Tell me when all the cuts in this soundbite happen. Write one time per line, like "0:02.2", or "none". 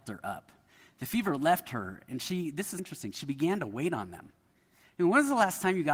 0:02.8